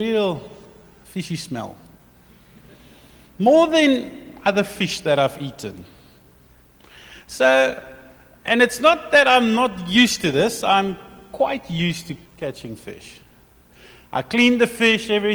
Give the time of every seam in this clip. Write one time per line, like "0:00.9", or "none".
0:12.3